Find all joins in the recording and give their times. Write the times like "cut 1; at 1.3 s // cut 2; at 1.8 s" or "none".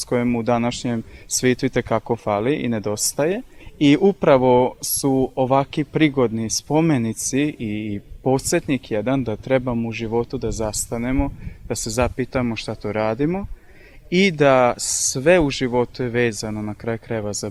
none